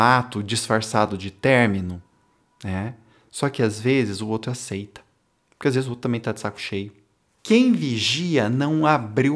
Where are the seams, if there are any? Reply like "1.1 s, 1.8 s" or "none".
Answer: 7.4 s